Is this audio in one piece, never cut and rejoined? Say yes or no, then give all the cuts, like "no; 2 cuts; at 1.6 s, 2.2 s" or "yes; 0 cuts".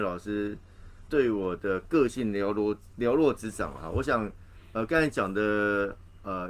no; 1 cut; at 1.1 s